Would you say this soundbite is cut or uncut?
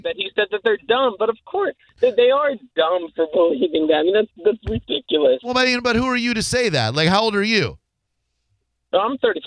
uncut